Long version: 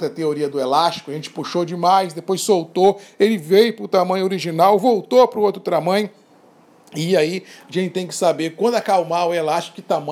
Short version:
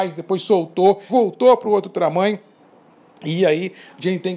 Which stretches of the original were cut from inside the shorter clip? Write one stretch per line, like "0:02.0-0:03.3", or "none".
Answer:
0:03.1-0:04.8